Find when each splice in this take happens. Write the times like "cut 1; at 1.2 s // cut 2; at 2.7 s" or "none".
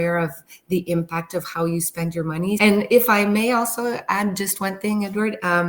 cut 1; at 2.6 s

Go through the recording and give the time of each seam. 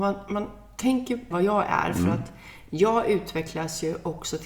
cut 1; at 1.3 s

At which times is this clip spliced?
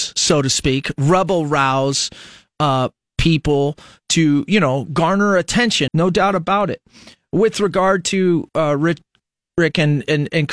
cut 1; at 5.9 s

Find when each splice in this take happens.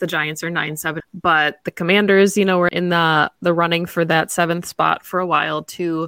cut 1; at 1.0 s // cut 2; at 2.7 s

